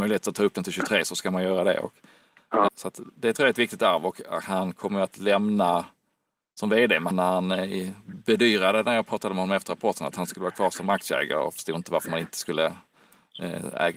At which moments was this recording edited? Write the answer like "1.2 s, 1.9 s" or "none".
2.7 s, 7.1 s